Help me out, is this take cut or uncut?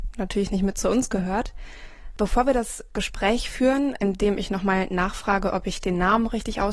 cut